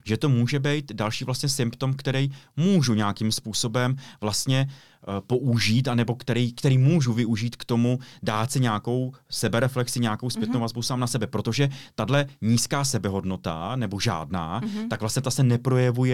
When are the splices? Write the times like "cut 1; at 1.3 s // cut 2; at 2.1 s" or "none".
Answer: none